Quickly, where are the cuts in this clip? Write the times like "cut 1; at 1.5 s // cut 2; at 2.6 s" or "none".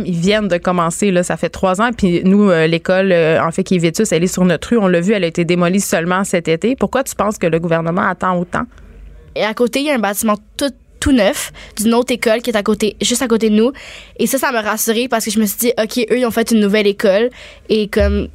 cut 1; at 9.4 s